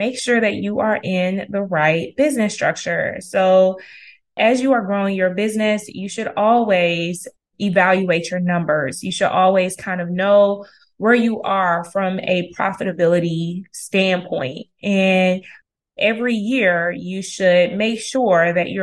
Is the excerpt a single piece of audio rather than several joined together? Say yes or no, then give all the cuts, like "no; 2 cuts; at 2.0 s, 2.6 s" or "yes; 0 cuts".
yes; 0 cuts